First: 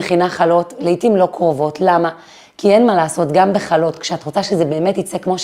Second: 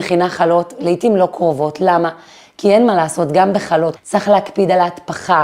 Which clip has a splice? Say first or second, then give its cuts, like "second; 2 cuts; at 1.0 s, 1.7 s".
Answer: second; 1 cut; at 4.0 s